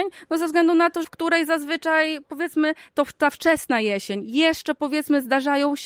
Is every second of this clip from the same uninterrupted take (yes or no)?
no